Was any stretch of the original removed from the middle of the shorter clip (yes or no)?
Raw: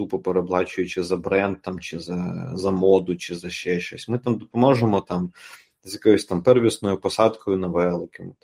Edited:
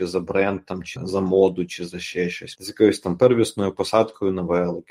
yes